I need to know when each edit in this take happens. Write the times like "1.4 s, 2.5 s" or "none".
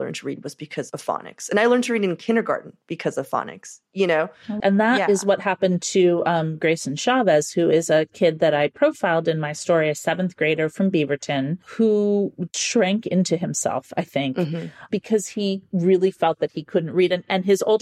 4.6 s, 12.5 s